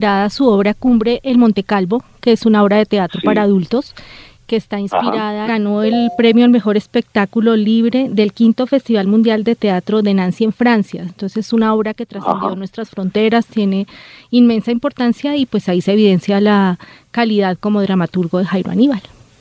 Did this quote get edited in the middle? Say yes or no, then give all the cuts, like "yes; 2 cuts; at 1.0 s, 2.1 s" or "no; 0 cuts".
yes; 1 cut; at 5.4 s